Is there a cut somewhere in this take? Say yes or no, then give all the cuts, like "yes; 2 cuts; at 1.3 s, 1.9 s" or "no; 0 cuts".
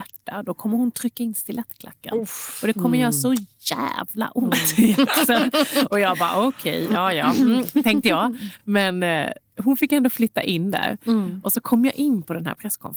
no; 0 cuts